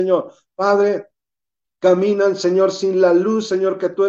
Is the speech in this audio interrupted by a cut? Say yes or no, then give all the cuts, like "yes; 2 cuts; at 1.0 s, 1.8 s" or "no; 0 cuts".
no; 0 cuts